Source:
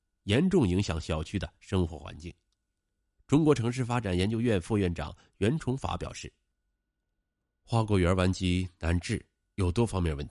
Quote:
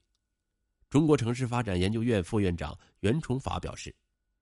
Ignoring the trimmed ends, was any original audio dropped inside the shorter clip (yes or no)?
no